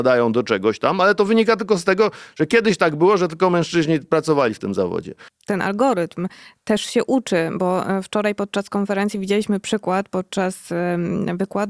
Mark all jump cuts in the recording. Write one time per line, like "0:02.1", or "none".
0:05.3